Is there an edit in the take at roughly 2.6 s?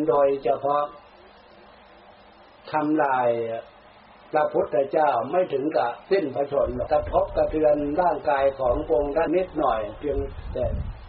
no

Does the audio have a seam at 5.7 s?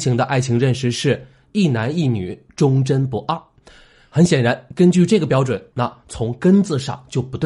yes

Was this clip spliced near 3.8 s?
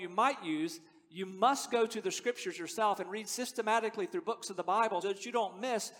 no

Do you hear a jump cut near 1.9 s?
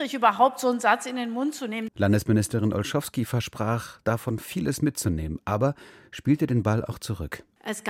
yes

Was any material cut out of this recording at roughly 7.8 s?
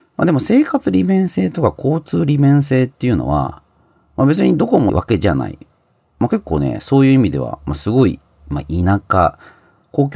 no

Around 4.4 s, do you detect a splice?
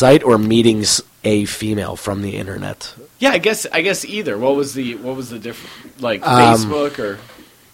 no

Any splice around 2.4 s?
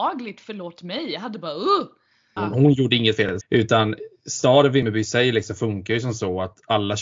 yes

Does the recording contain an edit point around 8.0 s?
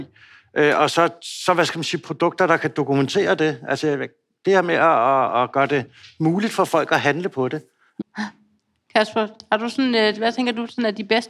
yes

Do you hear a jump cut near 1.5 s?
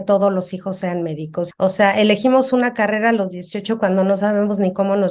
yes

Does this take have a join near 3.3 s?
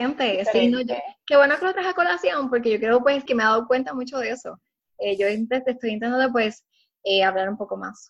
yes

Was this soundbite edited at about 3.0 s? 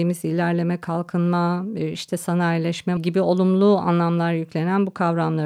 yes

